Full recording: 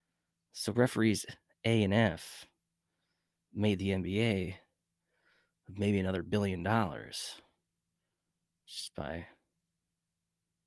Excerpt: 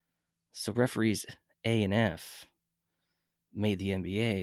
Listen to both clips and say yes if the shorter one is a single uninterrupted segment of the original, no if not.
yes